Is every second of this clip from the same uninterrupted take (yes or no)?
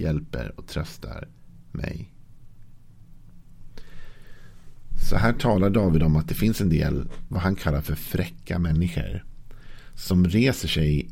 yes